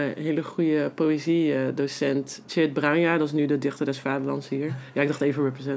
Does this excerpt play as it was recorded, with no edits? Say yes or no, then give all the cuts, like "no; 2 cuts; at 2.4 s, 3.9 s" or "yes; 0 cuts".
yes; 0 cuts